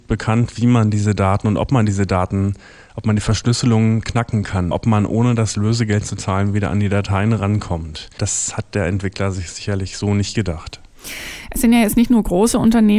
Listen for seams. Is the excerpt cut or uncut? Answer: cut